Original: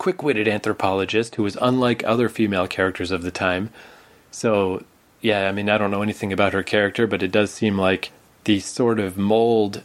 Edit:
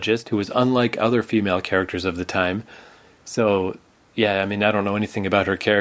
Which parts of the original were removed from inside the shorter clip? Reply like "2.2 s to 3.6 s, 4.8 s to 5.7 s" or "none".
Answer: none